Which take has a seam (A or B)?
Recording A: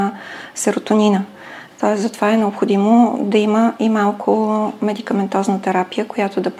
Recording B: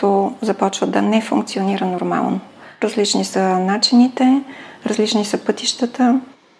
B